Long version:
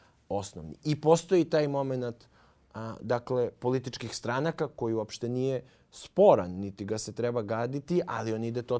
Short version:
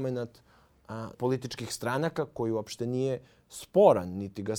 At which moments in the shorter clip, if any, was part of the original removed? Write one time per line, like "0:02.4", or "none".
0:01.1